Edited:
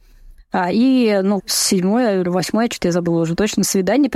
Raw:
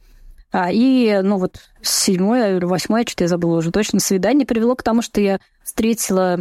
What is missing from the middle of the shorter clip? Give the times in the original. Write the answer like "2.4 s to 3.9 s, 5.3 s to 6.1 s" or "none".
1.4 s to 1.7 s